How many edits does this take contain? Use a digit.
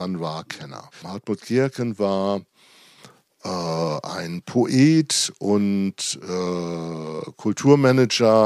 1